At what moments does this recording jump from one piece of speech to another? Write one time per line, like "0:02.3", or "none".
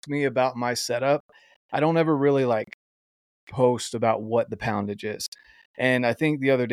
none